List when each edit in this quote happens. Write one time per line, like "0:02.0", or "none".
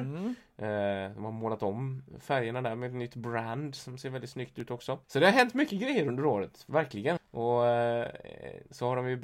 0:05.0
0:07.2

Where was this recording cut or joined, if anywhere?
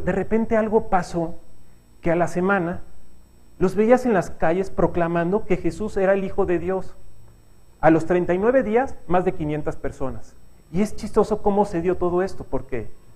0:07.7
0:10.6

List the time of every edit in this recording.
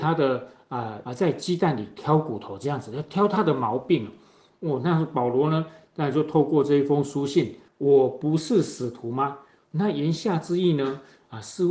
0:01.0
0:07.7

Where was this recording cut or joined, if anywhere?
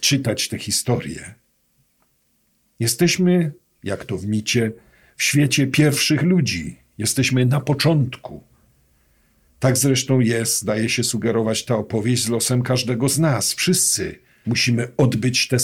none

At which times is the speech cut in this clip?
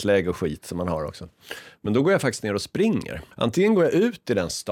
0:03.3

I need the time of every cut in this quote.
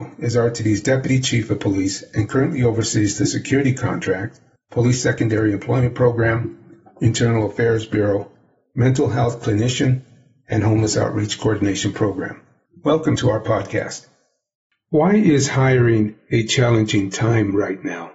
0:13.2

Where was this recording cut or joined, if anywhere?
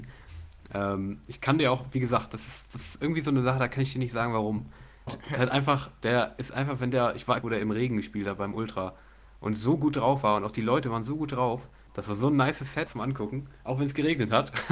0:05.1
0:07.4
0:12.9

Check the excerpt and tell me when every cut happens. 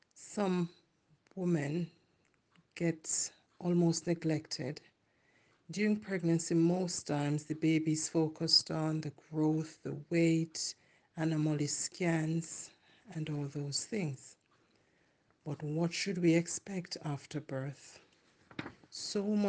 none

